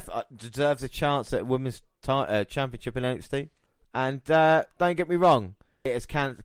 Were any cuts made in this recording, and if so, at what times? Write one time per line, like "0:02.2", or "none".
0:03.8